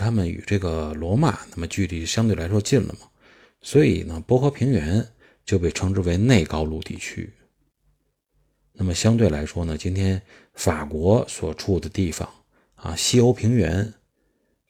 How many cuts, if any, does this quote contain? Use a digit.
0